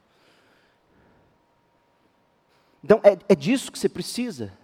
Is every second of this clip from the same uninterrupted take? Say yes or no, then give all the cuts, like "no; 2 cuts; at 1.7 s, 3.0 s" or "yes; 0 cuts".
yes; 0 cuts